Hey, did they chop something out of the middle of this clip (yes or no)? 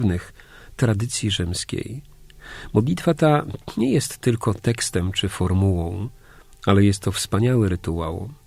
no